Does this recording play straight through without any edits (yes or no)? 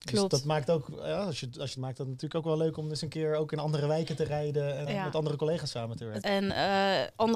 no